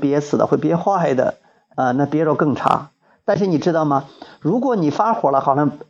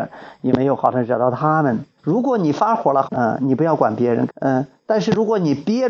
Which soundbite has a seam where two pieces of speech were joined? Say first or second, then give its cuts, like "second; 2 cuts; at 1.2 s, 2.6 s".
second; 3 cuts; at 2.0 s, 3.0 s, 4.3 s